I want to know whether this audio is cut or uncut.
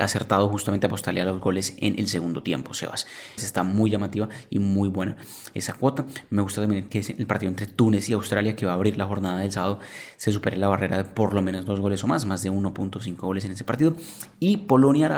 cut